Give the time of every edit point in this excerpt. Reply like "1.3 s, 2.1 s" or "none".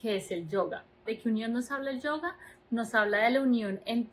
1.1 s